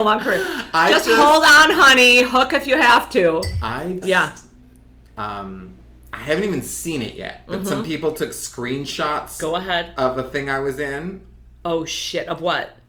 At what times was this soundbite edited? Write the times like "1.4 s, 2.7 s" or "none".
4.0 s